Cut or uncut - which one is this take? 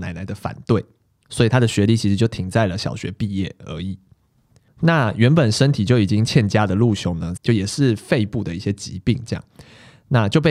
cut